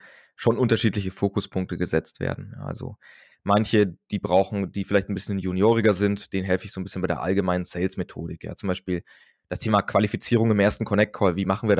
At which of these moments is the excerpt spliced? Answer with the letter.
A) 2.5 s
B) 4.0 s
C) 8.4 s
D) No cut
D